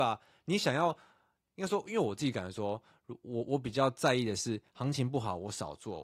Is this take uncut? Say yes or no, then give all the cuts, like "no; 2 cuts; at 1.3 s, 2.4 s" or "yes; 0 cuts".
yes; 0 cuts